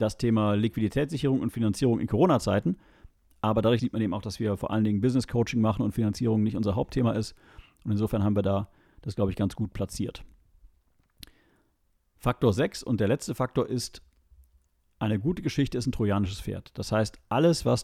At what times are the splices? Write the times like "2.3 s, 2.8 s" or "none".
3.8 s